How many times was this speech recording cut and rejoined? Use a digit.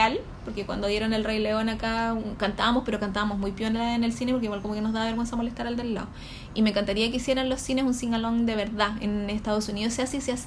0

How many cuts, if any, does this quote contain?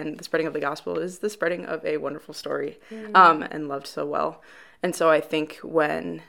1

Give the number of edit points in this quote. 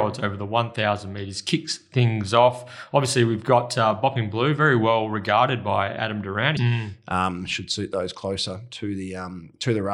1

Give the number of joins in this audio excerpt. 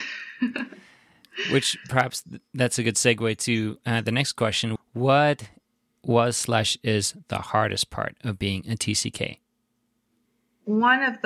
1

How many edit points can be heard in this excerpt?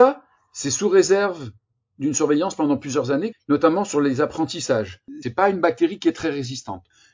2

